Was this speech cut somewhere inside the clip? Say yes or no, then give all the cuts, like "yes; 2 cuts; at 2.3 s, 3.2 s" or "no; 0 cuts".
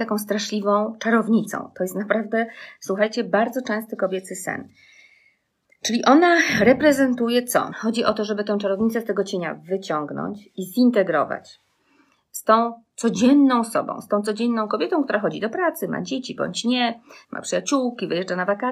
yes; 2 cuts; at 7.7 s, 17.2 s